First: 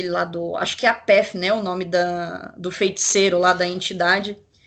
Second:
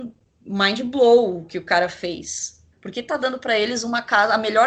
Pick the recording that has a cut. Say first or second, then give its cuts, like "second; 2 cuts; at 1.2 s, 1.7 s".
second; 1 cut; at 2.7 s